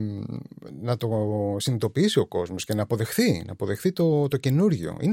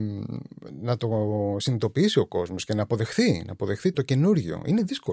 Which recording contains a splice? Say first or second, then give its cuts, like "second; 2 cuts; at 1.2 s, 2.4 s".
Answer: second; 1 cut; at 3.9 s